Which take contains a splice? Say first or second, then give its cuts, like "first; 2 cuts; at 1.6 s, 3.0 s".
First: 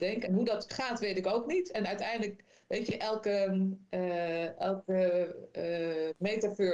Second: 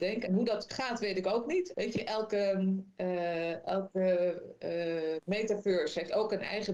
second; 1 cut; at 1.7 s